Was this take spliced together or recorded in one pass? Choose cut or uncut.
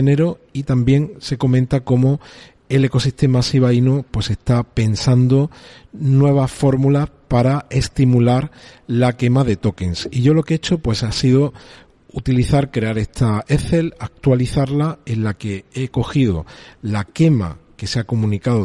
uncut